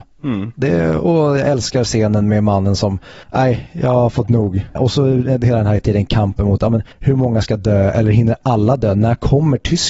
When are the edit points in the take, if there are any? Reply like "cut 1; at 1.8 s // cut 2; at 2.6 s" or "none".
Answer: cut 1; at 3.2 s // cut 2; at 4.8 s // cut 3; at 6.9 s